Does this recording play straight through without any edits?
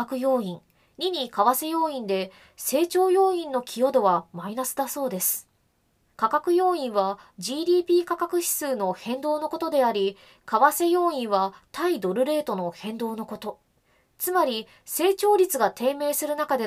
no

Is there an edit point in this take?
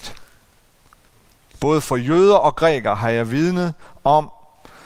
no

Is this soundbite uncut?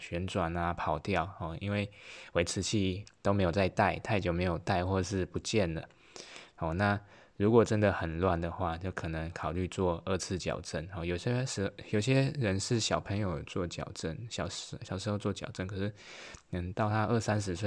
no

